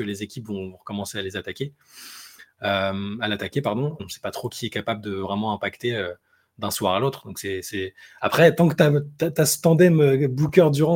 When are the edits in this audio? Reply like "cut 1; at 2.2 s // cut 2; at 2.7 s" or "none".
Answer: cut 1; at 4.0 s